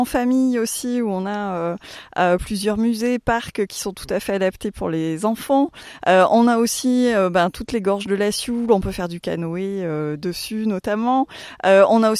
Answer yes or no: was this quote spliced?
no